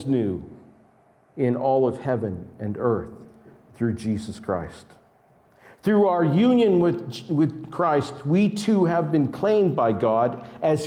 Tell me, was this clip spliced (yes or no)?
no